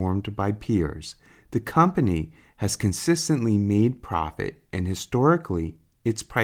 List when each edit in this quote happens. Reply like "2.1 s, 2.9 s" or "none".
none